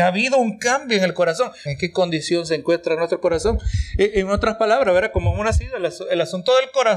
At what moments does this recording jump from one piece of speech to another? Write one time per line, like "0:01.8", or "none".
0:01.7